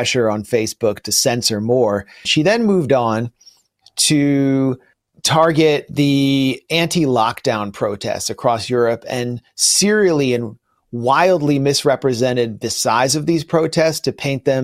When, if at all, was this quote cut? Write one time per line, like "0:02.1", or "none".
0:02.2